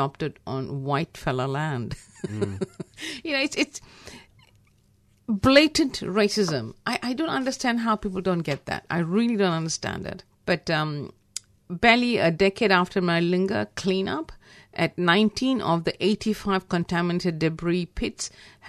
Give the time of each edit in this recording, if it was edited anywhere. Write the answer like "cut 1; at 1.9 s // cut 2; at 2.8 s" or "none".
cut 1; at 10.3 s